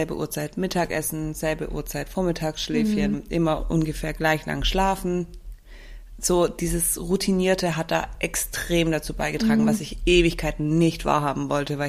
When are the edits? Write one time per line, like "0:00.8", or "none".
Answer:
none